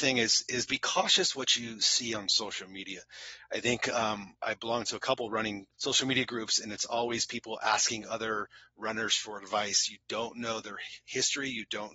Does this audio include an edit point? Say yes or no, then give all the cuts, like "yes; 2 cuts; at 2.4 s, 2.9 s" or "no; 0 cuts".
yes; 1 cut; at 4.4 s